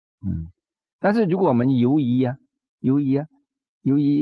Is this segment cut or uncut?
uncut